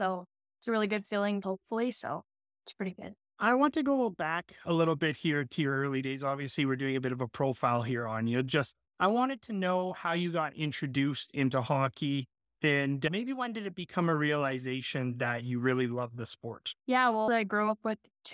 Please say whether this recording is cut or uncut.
cut